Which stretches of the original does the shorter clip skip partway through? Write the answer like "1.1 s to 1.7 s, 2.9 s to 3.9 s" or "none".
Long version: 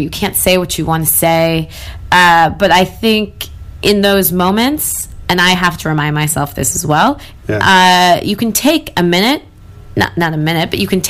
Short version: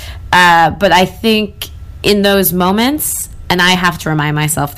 none